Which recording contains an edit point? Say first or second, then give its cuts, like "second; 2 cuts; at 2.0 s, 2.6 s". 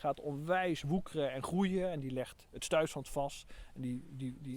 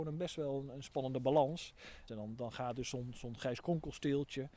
second; 1 cut; at 2.1 s